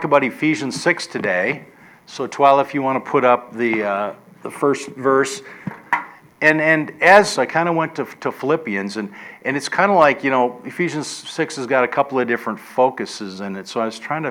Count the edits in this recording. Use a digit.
1